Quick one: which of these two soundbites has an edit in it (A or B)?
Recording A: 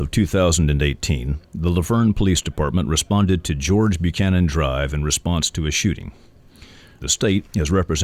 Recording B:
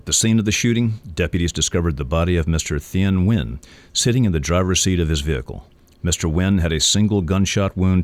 A